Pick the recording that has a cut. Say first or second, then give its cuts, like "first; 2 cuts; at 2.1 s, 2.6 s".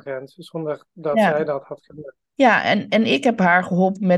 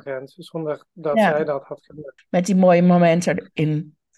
second; 1 cut; at 2.2 s